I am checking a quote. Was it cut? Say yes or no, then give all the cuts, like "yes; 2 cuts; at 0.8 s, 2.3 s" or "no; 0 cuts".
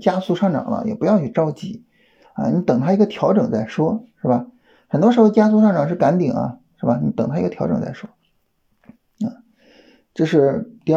no; 0 cuts